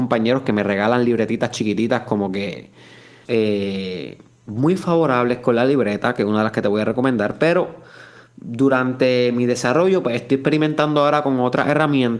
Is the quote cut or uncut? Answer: cut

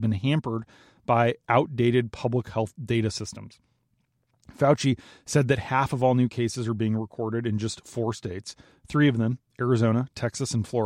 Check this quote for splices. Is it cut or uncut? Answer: uncut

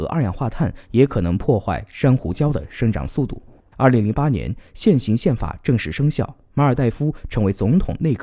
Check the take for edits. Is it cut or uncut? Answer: cut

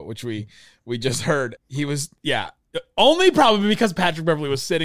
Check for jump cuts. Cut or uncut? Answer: cut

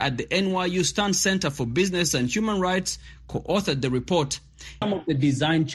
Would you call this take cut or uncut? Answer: cut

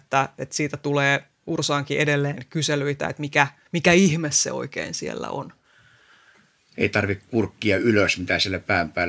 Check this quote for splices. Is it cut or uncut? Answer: cut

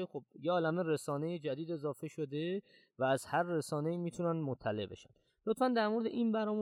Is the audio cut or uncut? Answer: uncut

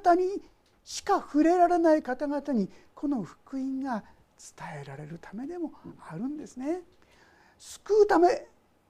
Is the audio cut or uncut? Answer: uncut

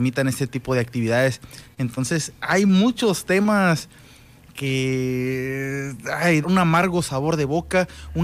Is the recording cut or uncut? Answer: cut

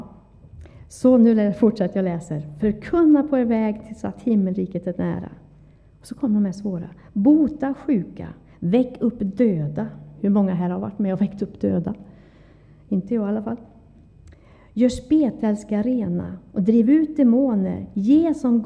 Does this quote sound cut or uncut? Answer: uncut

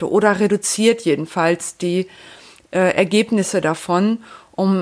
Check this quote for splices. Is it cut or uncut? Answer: uncut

